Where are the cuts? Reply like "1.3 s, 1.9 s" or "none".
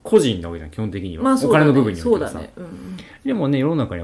none